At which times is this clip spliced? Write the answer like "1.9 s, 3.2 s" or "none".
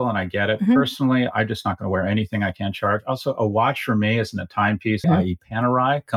5.0 s